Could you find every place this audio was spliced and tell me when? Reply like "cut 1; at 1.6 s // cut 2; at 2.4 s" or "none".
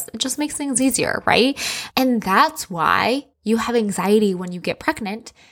cut 1; at 1.9 s // cut 2; at 3.3 s